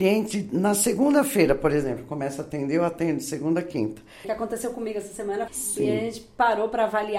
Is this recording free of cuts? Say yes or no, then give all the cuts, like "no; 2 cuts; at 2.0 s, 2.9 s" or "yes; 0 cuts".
no; 2 cuts; at 4.2 s, 5.5 s